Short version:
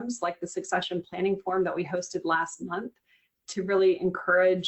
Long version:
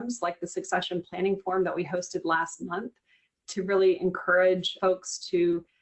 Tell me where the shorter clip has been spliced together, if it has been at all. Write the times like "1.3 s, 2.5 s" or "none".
none